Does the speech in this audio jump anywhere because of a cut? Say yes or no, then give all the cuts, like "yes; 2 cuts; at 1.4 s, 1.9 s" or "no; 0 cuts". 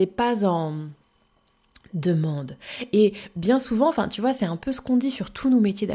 no; 0 cuts